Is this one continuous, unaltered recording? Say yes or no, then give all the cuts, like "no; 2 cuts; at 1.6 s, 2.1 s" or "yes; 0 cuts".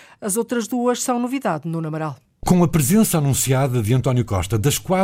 yes; 0 cuts